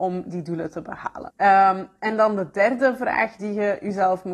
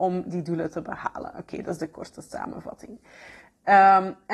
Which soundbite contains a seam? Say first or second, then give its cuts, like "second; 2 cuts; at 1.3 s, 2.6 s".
first; 1 cut; at 1.3 s